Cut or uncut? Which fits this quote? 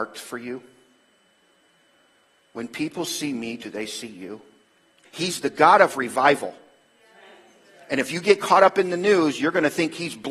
cut